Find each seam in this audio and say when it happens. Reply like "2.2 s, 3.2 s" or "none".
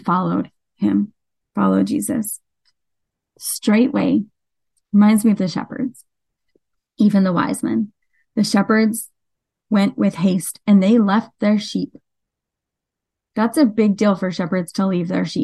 none